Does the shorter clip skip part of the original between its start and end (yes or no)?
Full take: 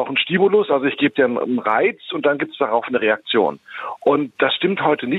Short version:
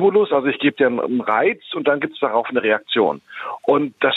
no